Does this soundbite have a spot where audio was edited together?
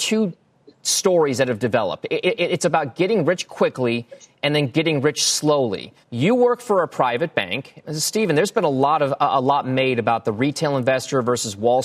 yes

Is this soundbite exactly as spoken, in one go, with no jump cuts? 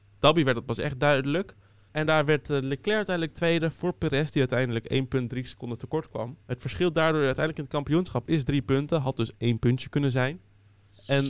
no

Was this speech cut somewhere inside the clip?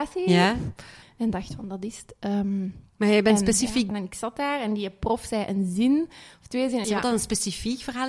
yes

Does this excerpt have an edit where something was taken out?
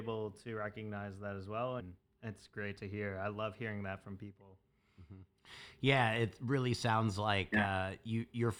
yes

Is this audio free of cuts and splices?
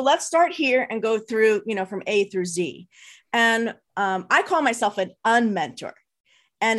yes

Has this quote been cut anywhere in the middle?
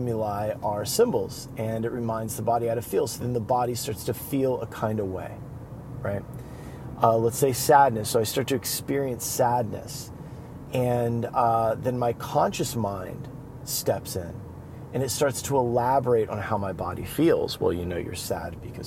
no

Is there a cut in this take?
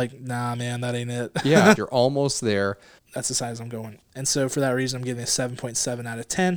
yes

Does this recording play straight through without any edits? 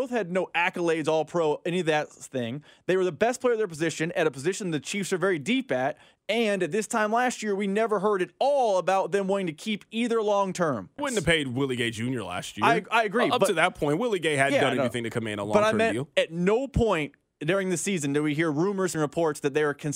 no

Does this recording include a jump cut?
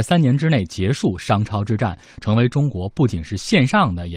yes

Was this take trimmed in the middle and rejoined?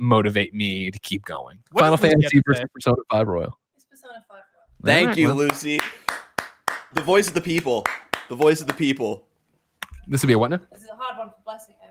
yes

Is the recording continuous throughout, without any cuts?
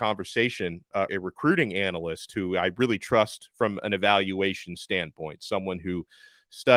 no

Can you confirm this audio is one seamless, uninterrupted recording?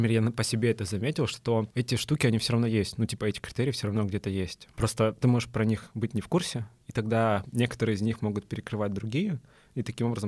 no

